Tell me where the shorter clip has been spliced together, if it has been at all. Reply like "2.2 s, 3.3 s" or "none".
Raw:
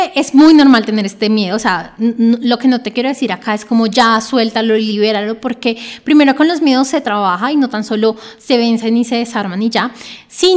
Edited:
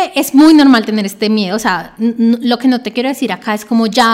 none